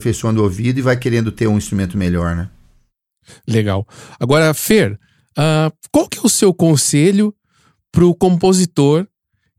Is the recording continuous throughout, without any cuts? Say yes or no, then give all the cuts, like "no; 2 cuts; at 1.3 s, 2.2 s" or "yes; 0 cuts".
yes; 0 cuts